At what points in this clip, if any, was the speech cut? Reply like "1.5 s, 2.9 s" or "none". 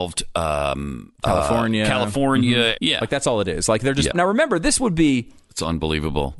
2.8 s, 4.1 s